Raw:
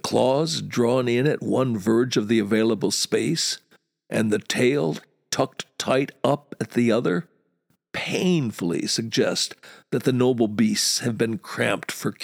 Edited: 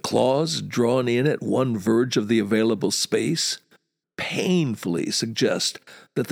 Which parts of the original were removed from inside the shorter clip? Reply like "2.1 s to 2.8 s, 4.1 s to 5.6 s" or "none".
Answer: 4.0 s to 7.8 s